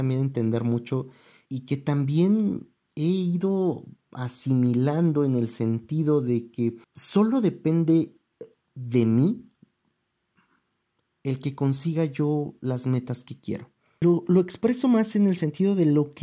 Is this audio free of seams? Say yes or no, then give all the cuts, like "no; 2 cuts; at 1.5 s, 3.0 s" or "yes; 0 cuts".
no; 3 cuts; at 1.5 s, 6.8 s, 14.0 s